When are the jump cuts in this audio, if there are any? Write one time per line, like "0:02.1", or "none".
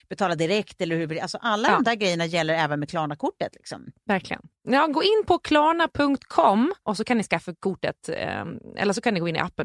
none